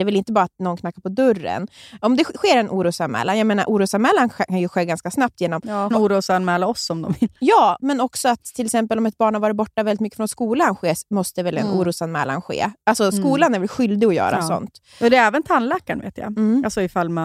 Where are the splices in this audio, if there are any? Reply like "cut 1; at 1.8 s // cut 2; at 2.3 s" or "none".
cut 1; at 5.9 s